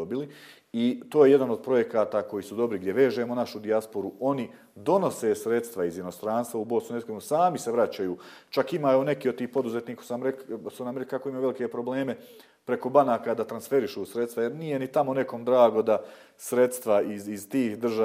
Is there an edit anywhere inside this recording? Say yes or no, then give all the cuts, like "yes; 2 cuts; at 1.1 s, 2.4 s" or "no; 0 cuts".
no; 0 cuts